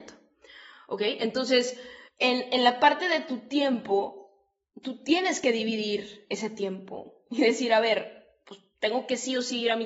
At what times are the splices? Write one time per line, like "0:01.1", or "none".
none